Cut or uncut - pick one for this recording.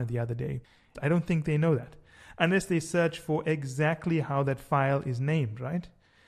cut